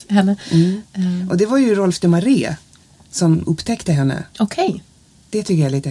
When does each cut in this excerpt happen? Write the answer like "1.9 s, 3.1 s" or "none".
none